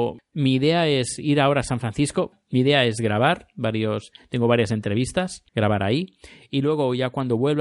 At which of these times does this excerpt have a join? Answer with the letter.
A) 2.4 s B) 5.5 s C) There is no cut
B